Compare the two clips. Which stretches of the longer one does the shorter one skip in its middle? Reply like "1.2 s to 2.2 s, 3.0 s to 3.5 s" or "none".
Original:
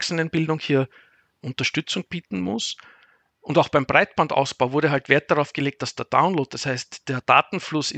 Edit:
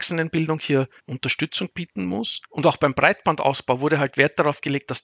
1.0 s to 1.3 s, 2.8 s to 3.4 s